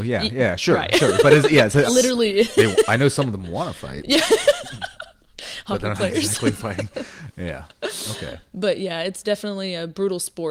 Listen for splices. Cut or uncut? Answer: cut